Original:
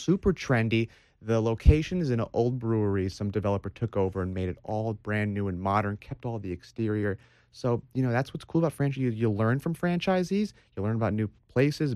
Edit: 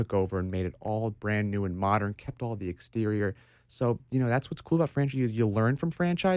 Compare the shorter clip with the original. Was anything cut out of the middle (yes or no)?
no